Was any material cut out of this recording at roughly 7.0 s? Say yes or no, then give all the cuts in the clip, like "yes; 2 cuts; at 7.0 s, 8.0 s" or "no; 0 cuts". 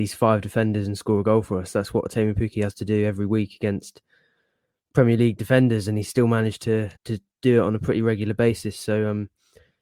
yes; 1 cut; at 7.0 s